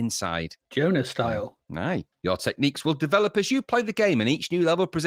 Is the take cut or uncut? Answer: cut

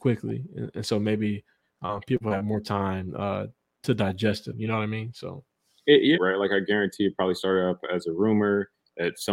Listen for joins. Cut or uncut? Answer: cut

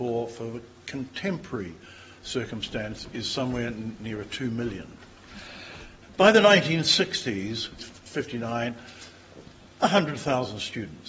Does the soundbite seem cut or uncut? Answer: cut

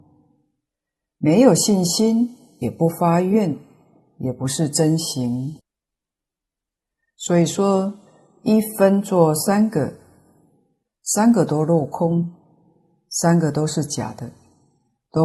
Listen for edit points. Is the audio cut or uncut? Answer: uncut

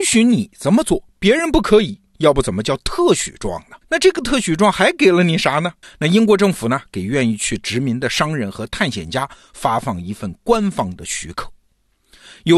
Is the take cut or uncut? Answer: cut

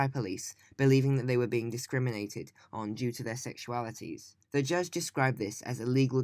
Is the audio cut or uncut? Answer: cut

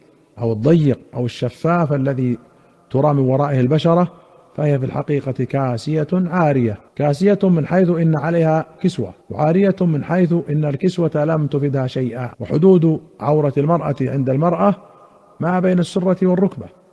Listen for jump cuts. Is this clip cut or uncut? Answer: cut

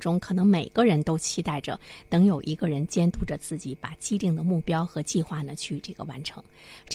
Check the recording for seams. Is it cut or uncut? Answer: uncut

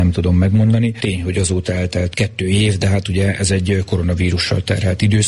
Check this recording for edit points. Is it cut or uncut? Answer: uncut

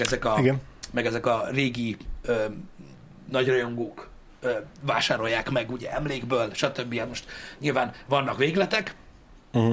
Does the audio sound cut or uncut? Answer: uncut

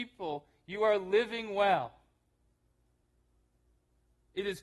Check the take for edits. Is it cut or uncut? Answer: uncut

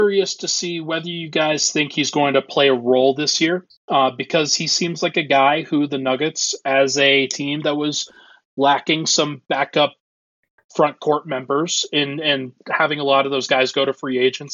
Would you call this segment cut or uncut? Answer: cut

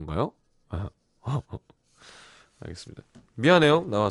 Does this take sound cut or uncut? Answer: cut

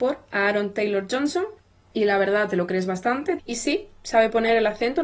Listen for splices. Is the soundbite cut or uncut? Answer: cut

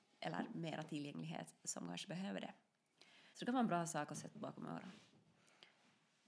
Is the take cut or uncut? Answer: cut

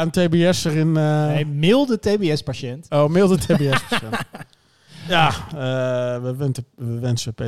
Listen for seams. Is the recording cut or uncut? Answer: uncut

